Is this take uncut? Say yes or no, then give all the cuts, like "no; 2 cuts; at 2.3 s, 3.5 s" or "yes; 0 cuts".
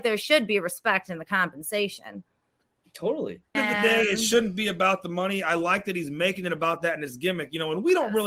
no; 1 cut; at 3.5 s